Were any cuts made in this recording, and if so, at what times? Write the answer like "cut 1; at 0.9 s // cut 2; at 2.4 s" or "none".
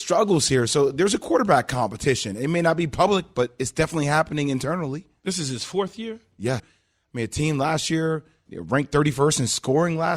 cut 1; at 6.6 s // cut 2; at 8.5 s